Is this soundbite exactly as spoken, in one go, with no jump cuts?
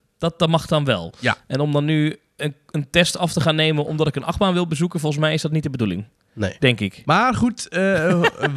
no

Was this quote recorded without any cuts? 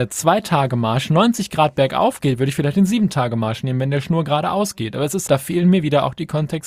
no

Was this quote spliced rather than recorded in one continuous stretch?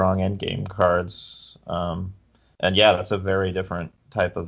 no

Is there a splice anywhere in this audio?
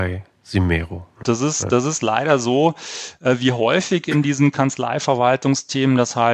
yes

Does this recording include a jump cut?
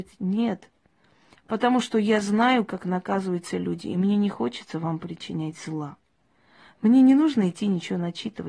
no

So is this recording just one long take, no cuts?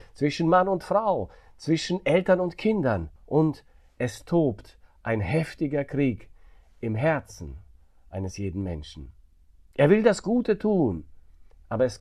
no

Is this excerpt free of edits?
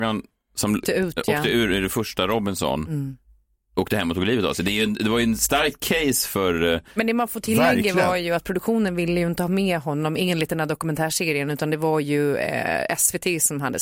yes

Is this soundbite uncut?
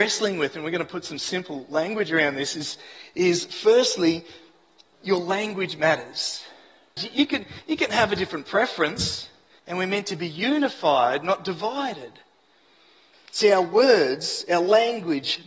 no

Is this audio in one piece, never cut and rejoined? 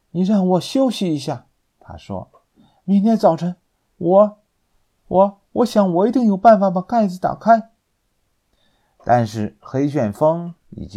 yes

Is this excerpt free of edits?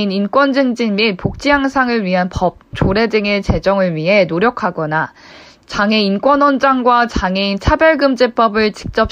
no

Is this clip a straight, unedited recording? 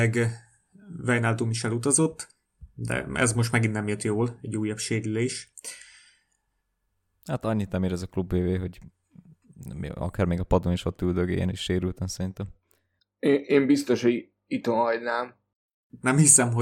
yes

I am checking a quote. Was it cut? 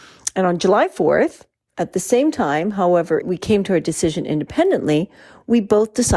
yes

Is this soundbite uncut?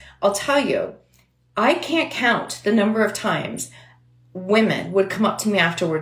yes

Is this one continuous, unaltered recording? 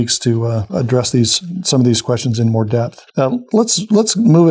no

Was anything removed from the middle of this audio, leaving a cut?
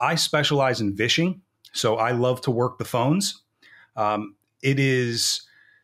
no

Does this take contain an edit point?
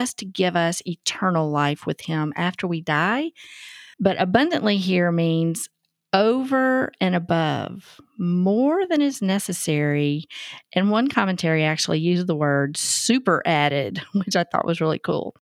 yes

